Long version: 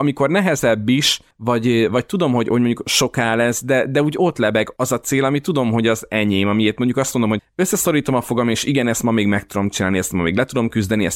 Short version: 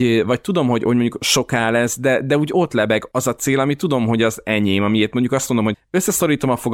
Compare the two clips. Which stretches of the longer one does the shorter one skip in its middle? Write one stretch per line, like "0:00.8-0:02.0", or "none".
none